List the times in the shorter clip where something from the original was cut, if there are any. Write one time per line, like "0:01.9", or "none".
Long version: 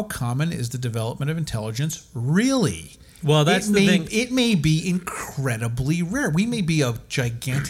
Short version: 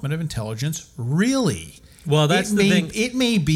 none